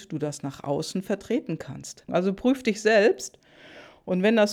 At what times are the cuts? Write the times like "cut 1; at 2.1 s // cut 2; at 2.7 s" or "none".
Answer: cut 1; at 2.1 s

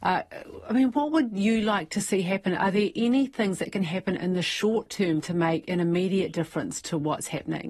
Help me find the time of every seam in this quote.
none

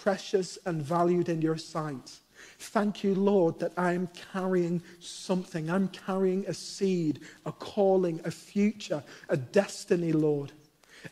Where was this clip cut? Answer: none

